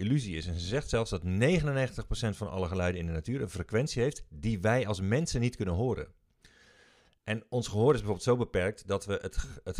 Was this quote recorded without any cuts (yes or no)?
yes